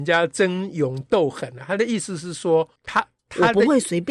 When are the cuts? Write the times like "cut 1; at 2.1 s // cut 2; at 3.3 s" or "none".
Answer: cut 1; at 2.8 s